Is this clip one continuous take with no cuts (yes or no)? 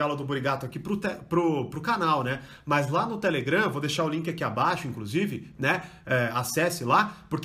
yes